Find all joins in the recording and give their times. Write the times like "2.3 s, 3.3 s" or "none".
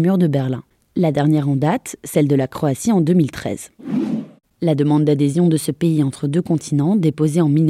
4.4 s

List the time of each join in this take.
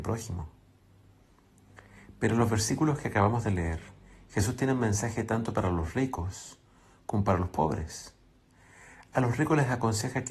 none

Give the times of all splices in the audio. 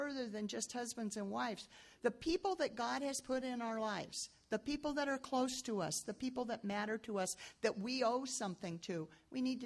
none

